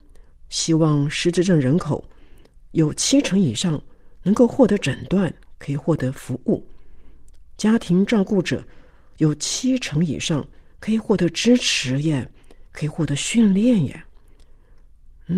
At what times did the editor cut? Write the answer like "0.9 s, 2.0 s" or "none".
7.6 s